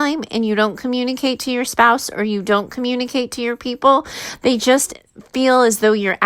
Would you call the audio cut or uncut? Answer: uncut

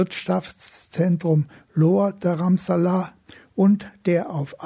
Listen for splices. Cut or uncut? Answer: uncut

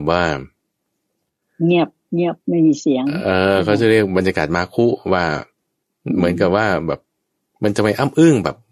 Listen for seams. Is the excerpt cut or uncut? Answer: uncut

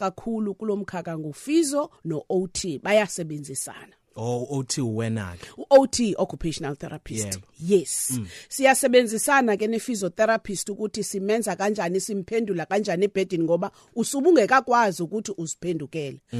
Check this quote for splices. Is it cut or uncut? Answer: uncut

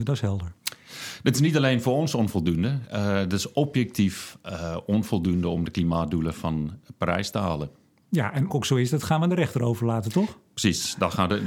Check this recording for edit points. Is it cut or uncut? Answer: cut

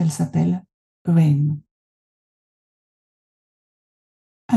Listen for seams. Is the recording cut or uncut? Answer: uncut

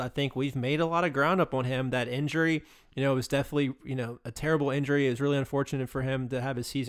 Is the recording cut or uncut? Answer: uncut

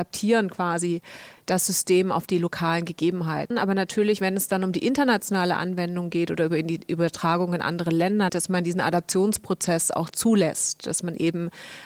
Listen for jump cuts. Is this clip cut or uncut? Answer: cut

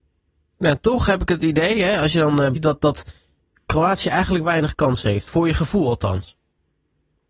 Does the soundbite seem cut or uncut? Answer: cut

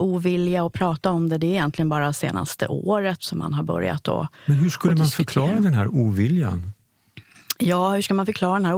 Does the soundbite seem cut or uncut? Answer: uncut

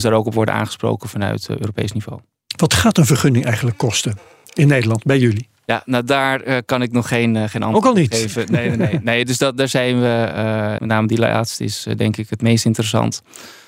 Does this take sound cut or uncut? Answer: cut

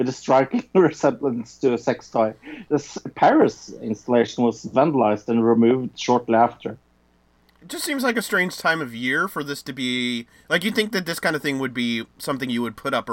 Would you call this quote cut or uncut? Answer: uncut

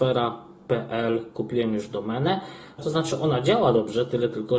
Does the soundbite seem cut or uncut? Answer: cut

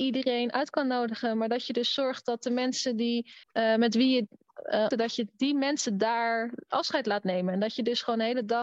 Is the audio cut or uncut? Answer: cut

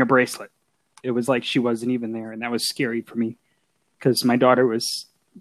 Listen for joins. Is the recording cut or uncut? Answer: uncut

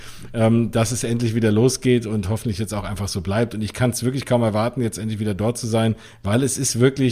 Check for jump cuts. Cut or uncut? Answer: uncut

